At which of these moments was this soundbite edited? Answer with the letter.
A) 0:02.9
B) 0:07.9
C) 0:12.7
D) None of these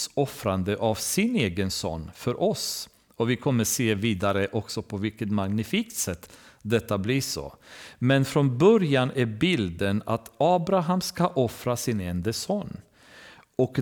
D